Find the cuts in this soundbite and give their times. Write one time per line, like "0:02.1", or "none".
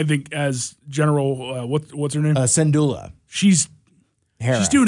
none